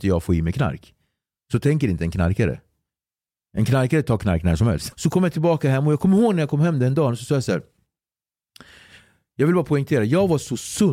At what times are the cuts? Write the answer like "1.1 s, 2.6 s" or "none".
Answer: 4.9 s